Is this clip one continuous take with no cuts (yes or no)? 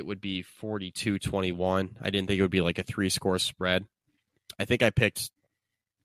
yes